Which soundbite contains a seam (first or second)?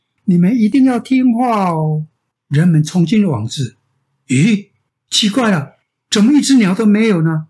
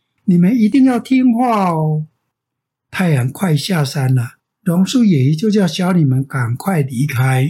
first